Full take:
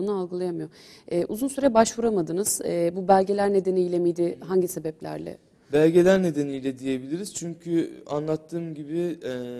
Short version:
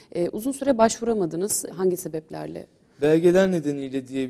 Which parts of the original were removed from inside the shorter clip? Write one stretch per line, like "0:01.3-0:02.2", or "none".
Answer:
0:02.6-0:04.4